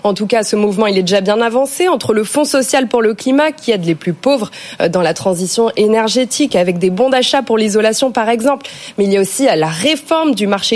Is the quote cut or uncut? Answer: uncut